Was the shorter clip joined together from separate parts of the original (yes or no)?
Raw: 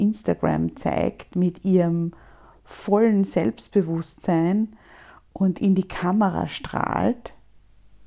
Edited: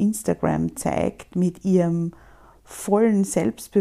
no